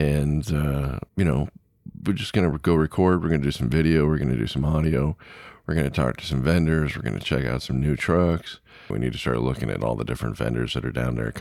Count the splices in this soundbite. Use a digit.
2